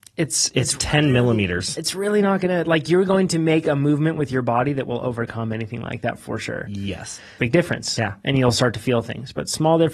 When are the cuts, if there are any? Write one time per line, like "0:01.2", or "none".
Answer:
0:07.4